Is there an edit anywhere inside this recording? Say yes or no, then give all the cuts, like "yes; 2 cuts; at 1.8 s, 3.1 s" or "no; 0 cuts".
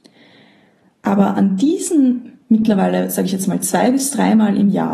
no; 0 cuts